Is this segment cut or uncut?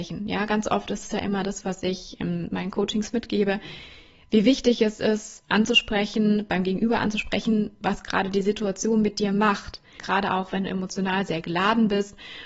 cut